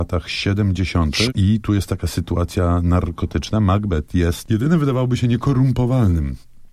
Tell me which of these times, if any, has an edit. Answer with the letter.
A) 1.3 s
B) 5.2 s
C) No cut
A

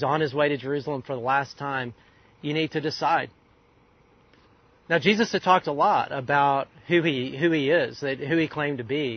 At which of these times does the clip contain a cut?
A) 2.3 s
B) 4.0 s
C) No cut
C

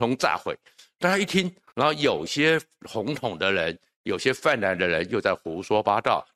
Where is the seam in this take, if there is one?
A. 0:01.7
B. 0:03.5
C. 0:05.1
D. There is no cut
A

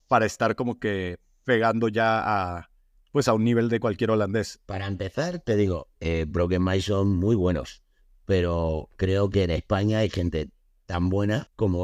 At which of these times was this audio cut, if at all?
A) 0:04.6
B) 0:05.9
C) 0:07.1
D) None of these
B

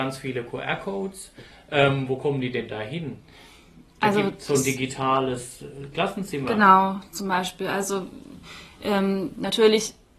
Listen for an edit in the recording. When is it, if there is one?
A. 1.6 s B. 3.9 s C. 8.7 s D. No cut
D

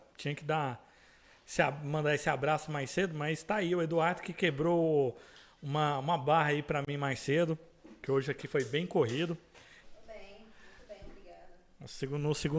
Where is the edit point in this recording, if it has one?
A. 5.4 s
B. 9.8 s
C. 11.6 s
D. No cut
B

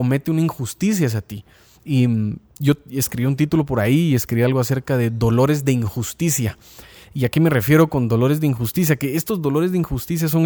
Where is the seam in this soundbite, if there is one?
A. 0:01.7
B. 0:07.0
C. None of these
A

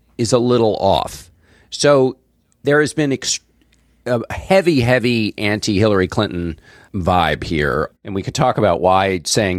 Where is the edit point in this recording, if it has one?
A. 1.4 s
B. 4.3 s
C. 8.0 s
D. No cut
C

